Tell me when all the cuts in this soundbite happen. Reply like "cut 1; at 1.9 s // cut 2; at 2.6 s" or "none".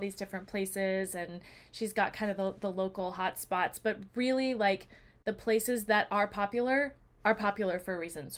none